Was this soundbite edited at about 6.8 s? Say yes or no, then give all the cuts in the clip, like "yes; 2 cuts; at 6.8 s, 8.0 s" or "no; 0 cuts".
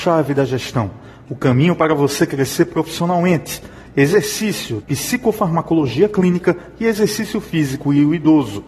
no; 1 cut; at 4.8 s